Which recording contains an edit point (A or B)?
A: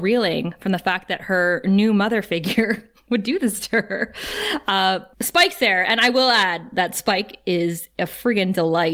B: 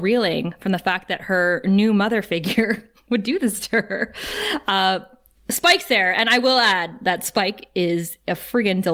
A